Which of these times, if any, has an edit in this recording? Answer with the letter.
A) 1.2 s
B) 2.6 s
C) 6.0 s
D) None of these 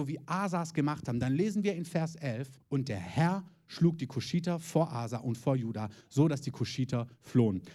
B